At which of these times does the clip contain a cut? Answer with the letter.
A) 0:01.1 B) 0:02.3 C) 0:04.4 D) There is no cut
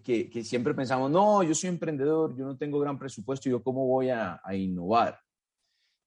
C